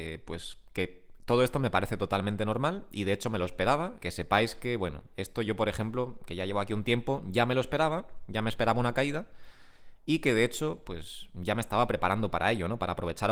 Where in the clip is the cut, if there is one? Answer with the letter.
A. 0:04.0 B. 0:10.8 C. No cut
A